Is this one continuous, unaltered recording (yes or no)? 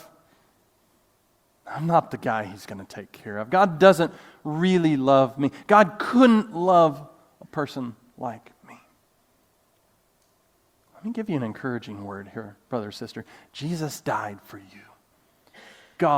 yes